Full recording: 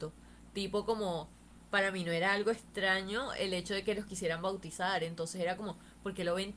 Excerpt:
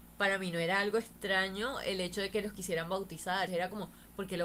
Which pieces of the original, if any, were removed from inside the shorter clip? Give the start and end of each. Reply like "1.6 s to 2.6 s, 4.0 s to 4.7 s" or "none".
5.0 s to 5.3 s

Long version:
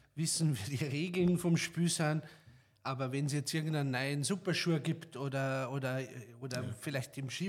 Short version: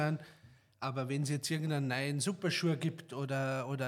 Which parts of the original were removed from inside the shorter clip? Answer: none

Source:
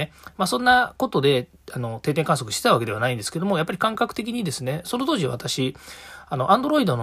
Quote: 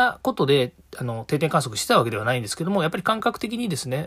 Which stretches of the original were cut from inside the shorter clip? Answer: none

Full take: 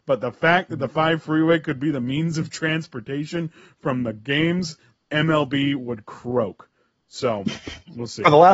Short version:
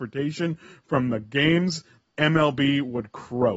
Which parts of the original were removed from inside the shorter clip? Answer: none

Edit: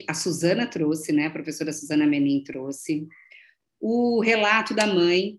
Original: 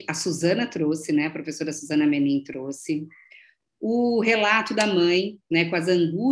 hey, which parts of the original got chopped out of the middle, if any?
none

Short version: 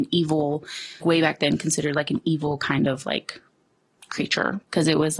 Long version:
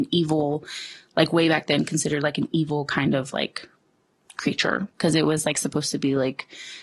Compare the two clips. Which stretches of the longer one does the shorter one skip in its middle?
1.0 s to 1.3 s

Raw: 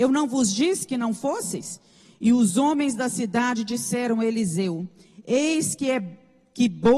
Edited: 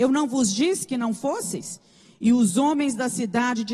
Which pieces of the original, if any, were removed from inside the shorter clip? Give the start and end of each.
none

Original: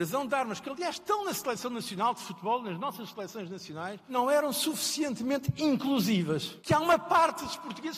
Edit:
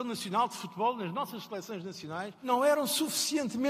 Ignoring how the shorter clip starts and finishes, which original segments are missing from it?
none

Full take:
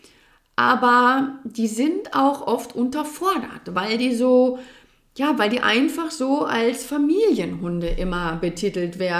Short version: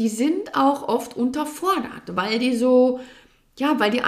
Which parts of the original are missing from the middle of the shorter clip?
none

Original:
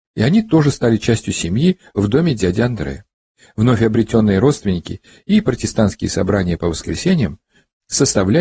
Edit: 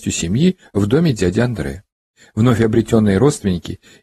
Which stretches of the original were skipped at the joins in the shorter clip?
none

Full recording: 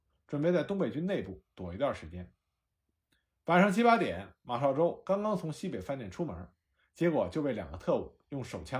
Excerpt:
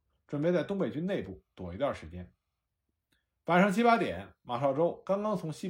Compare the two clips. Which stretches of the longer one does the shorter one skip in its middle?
none

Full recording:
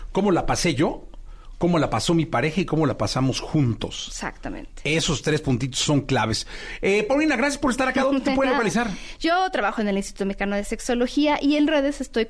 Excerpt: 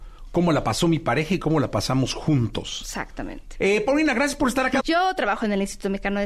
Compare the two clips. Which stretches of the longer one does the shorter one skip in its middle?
4.8 s to 6.8 s, 8.0 s to 9.2 s

